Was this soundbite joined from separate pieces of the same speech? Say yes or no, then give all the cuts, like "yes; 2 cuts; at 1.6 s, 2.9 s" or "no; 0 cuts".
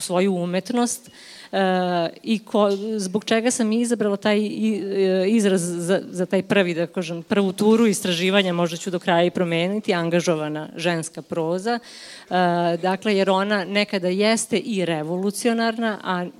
no; 0 cuts